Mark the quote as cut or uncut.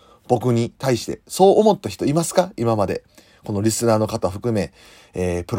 uncut